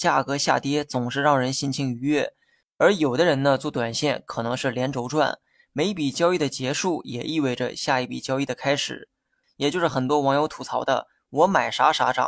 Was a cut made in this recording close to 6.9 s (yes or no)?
no